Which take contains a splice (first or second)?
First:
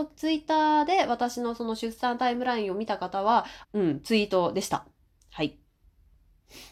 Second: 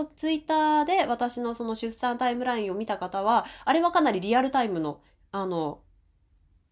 first